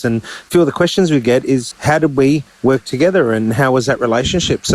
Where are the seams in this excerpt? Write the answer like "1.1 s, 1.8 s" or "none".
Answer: 1.7 s

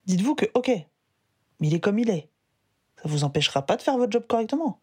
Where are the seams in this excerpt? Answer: none

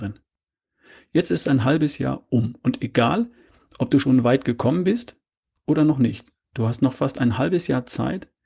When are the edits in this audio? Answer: none

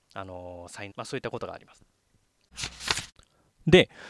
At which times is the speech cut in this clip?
0.9 s

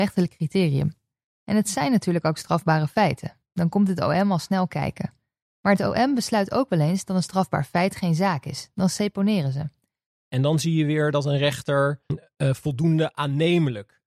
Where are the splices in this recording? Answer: 10.1 s, 12.1 s

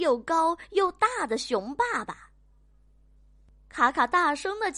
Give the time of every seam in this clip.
none

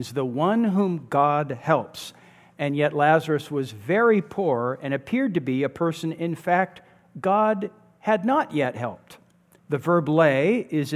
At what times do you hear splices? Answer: 9.6 s

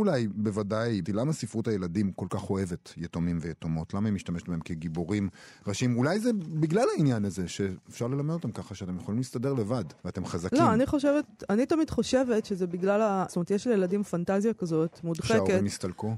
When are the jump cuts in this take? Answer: 1.0 s, 10.0 s, 13.3 s

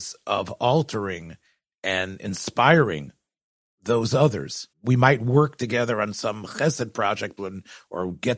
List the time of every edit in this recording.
4.7 s, 7.4 s

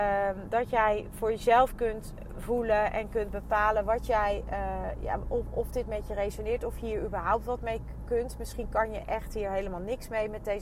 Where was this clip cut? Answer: none

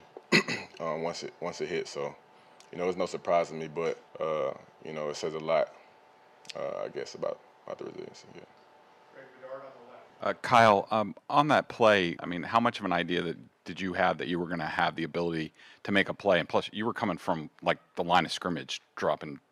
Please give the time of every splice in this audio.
4.1 s, 10.1 s, 12.2 s

